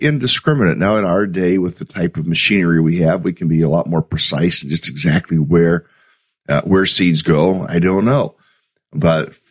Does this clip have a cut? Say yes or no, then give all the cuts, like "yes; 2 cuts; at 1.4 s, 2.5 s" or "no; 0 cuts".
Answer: yes; 1 cut; at 7.6 s